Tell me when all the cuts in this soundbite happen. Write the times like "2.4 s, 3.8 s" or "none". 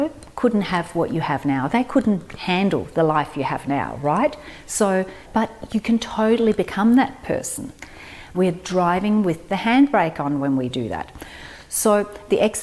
5.3 s, 8.3 s